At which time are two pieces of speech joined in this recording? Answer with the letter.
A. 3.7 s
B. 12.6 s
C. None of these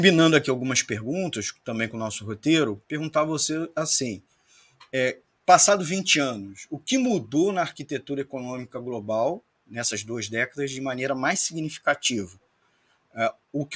C